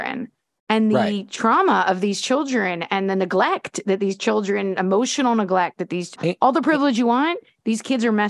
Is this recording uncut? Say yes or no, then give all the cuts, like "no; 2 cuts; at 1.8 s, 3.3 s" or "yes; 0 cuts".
no; 1 cut; at 6.2 s